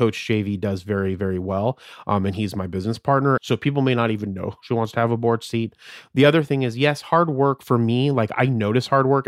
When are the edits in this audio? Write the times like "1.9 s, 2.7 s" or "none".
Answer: 3.4 s